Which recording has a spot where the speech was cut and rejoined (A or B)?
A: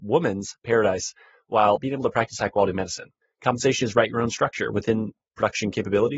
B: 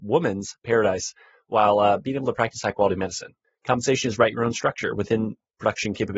A